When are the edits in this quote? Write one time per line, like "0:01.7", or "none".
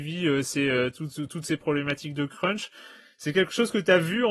none